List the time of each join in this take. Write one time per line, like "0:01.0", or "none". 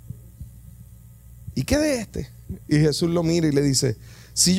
none